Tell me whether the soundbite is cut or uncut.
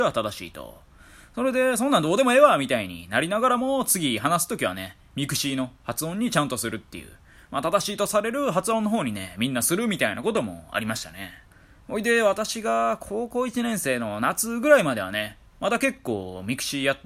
uncut